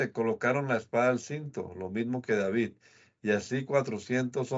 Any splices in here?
no; 0 cuts

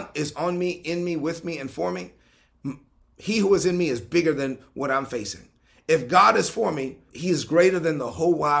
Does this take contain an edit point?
yes; 1 cut; at 7.1 s

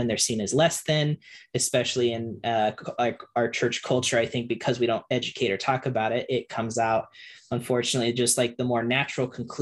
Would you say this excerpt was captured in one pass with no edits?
yes; 0 cuts

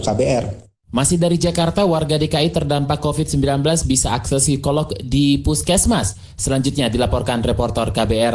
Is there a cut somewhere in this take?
no; 0 cuts

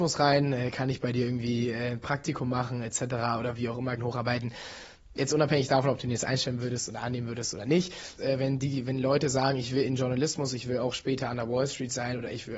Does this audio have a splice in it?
yes; 2 cuts; at 4.0 s, 8.2 s

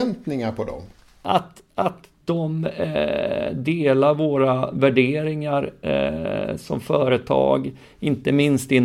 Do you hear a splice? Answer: no; 0 cuts

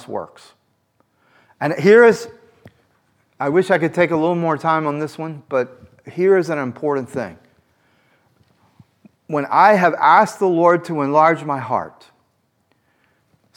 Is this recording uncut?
yes; 0 cuts

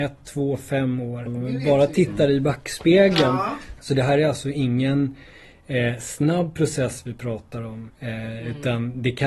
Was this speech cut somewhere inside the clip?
yes; 3 cuts; at 1.3 s, 3.8 s, 7.9 s

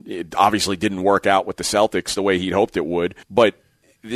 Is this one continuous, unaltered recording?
no; 1 cut; at 3.2 s

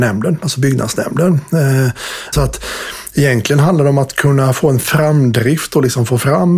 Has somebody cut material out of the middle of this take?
yes; 1 cut; at 2.3 s

